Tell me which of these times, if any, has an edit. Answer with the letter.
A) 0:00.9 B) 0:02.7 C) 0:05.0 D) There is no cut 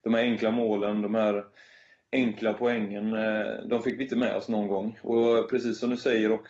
D